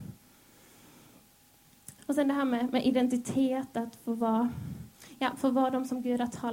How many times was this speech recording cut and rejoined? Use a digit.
1